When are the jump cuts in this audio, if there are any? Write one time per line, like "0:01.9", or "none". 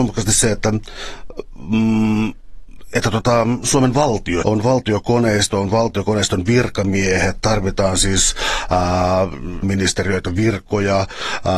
0:04.4
0:09.6